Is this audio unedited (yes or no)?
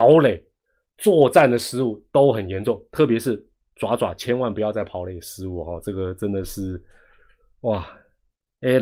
yes